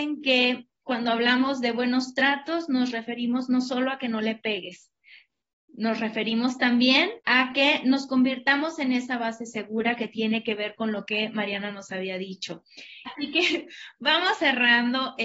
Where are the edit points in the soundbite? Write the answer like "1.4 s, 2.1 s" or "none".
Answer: 7.2 s, 13.1 s